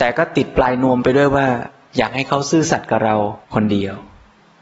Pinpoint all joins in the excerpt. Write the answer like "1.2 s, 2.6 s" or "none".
3.4 s